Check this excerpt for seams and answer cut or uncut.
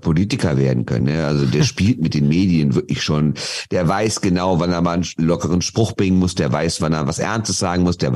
uncut